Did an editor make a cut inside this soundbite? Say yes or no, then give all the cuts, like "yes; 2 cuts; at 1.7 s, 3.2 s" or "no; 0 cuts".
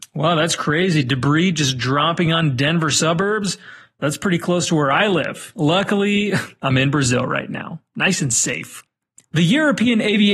no; 0 cuts